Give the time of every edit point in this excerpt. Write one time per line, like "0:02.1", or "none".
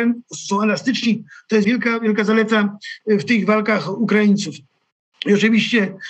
0:01.6